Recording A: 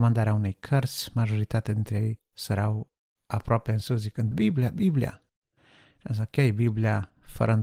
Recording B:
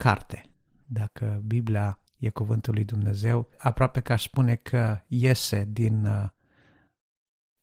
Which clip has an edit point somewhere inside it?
A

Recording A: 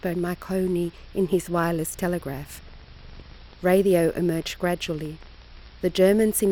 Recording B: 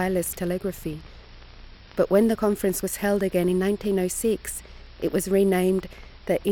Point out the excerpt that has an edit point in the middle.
A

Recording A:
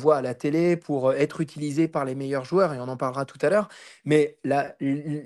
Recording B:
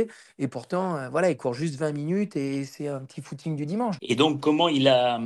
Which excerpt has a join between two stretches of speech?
B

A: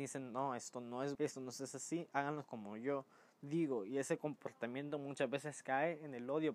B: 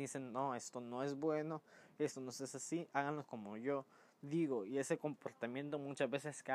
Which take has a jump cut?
A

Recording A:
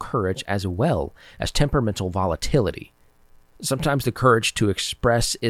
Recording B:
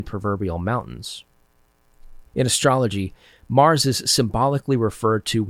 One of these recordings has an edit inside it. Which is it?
B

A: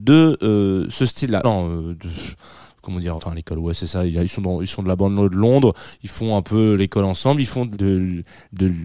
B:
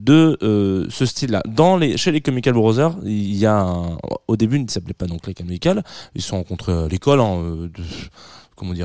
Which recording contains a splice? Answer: A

